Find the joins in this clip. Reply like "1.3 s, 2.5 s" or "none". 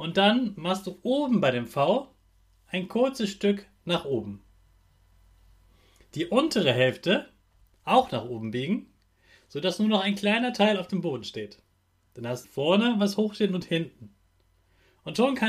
12.4 s